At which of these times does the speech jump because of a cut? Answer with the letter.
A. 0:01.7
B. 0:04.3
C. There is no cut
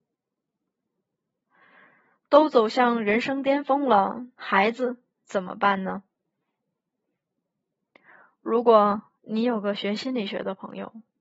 B